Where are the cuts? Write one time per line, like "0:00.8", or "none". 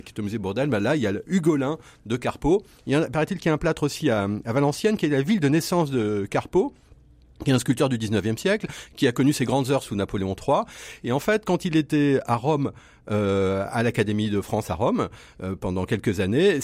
none